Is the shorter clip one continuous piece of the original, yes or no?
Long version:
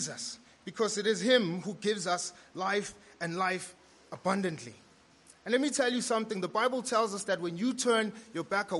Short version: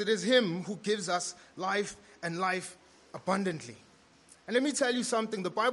yes